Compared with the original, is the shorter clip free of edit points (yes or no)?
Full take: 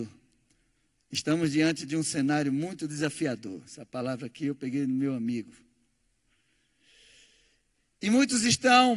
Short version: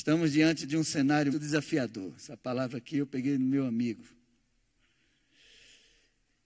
no